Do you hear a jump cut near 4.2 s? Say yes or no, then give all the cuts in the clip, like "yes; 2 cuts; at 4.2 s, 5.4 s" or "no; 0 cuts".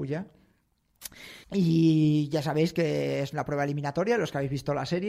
no; 1 cut; at 1.4 s